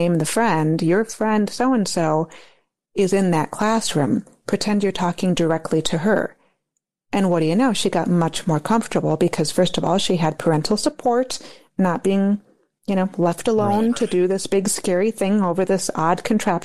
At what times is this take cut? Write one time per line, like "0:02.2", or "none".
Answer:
none